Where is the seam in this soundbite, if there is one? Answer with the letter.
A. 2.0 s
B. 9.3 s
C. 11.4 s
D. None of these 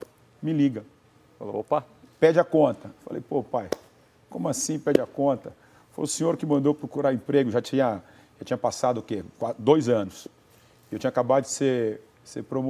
A